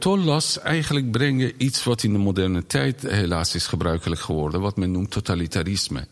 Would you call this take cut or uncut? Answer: uncut